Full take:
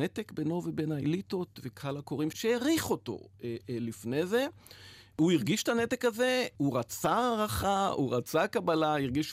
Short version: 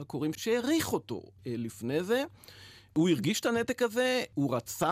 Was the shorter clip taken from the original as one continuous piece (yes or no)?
no